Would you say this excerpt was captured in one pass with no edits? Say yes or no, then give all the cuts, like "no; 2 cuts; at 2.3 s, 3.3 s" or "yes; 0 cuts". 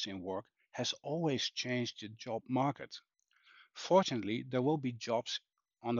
yes; 0 cuts